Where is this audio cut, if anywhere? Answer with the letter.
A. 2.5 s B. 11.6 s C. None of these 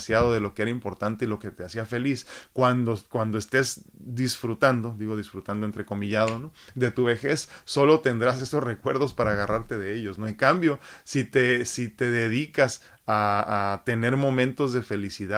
C